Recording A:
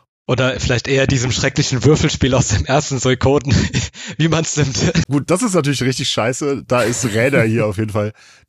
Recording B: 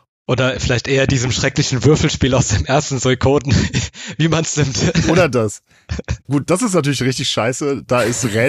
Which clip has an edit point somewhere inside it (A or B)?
A